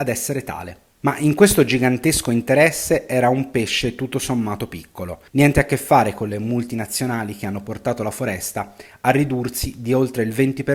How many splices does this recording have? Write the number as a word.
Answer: one